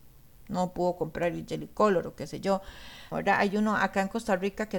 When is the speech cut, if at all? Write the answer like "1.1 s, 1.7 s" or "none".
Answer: 3.1 s